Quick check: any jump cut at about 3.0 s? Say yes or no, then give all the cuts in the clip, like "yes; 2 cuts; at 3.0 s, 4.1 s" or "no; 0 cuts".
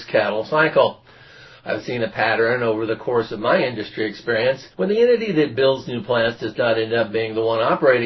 no; 2 cuts; at 1.6 s, 4.7 s